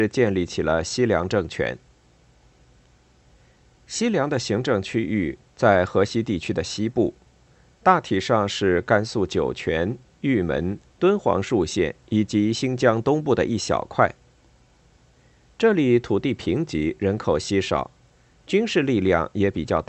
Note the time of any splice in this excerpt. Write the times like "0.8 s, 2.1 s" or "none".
10.9 s